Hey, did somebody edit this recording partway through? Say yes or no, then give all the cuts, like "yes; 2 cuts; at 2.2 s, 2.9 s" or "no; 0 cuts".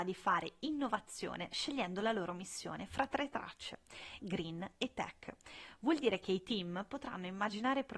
yes; 1 cut; at 4.2 s